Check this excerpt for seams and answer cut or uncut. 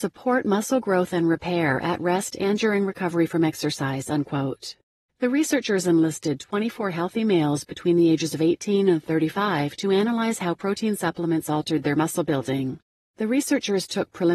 cut